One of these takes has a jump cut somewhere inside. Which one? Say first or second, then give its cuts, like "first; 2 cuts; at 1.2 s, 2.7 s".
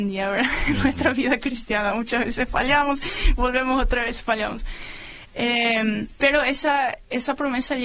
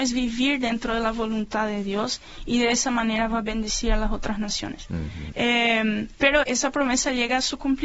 second; 2 cuts; at 5.3 s, 6.4 s